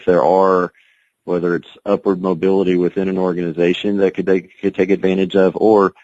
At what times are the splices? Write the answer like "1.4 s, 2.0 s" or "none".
none